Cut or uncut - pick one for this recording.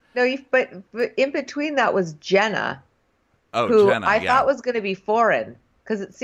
uncut